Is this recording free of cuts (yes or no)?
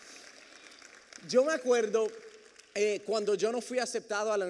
yes